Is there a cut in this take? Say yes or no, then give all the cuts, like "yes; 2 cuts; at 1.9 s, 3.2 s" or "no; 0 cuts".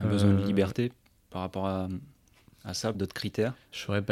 yes; 1 cut; at 2.9 s